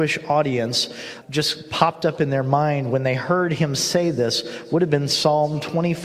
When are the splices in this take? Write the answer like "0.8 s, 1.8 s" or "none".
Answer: 1.2 s